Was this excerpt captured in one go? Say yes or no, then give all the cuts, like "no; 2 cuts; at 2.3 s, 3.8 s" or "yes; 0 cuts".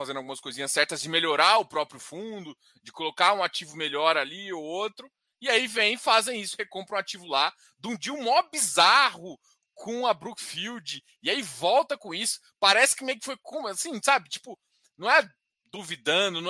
yes; 0 cuts